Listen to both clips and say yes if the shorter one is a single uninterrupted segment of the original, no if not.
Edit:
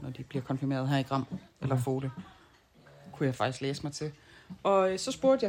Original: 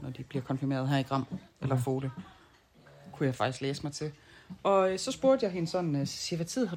yes